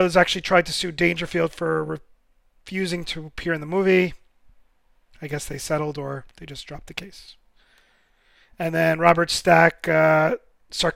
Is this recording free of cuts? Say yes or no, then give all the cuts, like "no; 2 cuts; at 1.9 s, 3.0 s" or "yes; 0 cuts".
yes; 0 cuts